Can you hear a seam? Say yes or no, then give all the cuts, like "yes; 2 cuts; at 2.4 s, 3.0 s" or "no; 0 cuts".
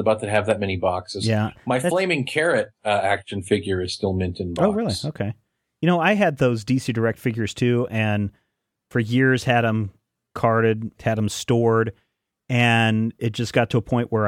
yes; 1 cut; at 11.0 s